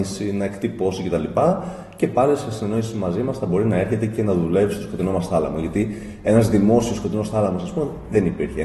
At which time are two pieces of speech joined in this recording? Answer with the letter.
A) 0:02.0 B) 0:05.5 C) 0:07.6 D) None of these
D